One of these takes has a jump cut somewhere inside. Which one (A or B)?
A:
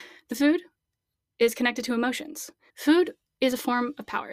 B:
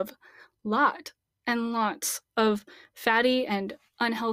A